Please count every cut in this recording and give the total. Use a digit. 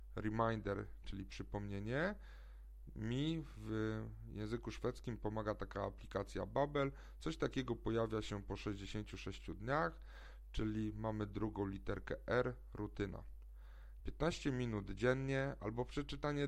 2